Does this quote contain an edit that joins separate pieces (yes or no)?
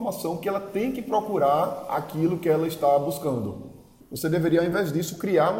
yes